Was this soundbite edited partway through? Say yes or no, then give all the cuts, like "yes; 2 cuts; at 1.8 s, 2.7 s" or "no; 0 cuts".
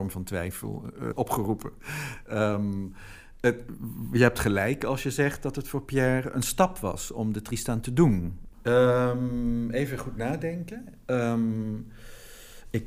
yes; 2 cuts; at 1.1 s, 8.5 s